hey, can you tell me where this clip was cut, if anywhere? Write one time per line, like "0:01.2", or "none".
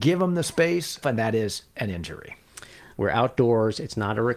0:01.0
0:02.9